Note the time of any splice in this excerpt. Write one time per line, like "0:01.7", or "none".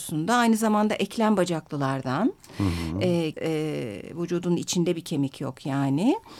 0:03.3